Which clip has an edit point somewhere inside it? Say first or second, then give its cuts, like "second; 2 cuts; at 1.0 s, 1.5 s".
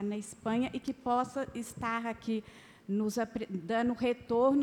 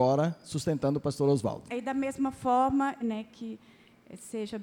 second; 2 cuts; at 1.7 s, 3.0 s